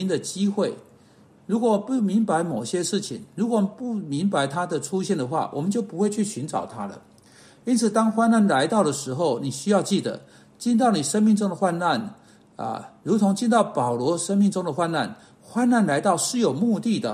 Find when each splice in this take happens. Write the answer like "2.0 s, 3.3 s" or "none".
1.4 s